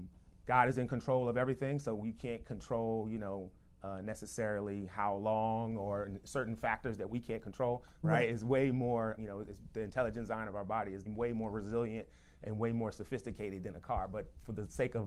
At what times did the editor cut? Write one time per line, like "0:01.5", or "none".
0:08.0
0:09.2
0:11.1